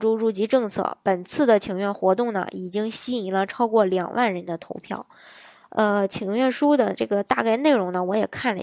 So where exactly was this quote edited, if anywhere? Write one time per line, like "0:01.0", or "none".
none